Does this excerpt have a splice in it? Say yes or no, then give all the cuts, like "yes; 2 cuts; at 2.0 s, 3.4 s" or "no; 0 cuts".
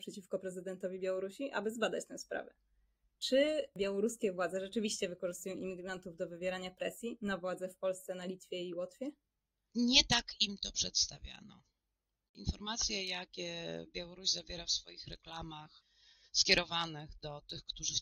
yes; 1 cut; at 9.5 s